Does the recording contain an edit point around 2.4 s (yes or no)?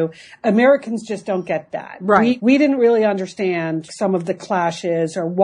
yes